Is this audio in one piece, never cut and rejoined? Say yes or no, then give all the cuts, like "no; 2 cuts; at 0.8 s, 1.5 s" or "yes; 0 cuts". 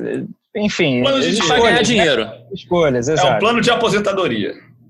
yes; 0 cuts